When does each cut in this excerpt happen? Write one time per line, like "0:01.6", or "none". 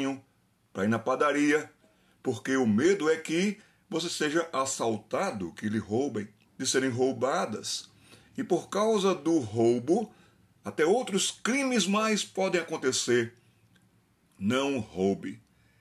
0:06.5
0:14.3